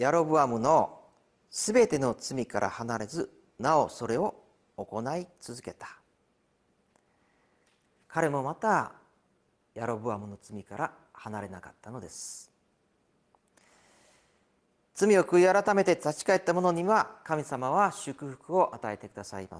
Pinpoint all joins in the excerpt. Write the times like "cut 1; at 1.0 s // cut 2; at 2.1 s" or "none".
none